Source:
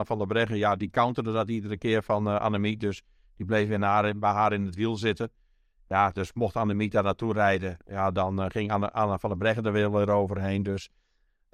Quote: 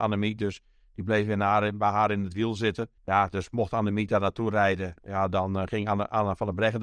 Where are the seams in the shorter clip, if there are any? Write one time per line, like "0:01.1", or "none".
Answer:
0:03.0